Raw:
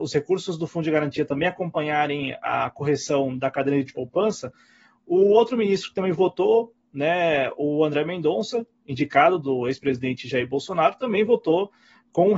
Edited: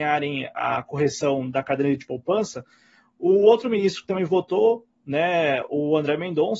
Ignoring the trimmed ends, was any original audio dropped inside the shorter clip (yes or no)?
no